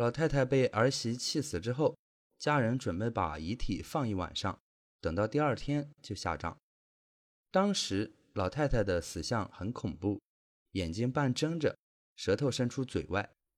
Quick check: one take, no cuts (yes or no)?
yes